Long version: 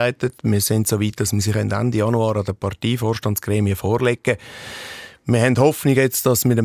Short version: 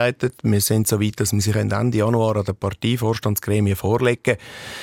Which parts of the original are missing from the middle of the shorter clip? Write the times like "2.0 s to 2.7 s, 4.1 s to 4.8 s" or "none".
none